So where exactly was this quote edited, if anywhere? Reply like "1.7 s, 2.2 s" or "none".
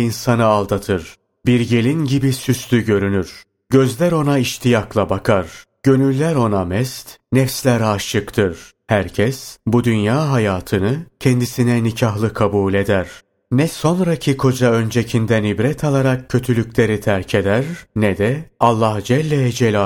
none